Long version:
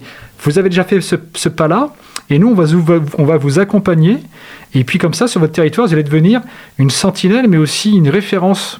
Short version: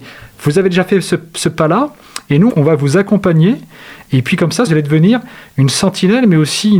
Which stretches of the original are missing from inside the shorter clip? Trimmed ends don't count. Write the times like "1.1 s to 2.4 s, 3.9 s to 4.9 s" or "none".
2.5 s to 3.1 s, 5.3 s to 5.9 s